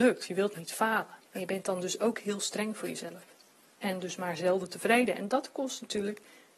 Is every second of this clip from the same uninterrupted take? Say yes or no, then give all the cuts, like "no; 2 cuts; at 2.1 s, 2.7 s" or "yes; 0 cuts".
no; 1 cut; at 1.3 s